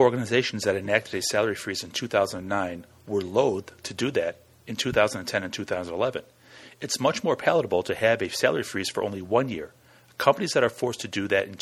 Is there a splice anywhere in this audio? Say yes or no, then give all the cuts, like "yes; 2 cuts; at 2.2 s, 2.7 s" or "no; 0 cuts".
no; 0 cuts